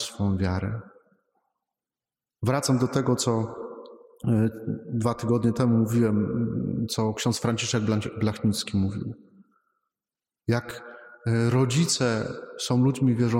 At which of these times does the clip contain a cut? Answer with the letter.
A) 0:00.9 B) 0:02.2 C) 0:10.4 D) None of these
D